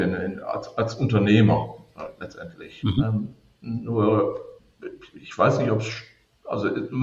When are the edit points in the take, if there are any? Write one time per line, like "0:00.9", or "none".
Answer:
none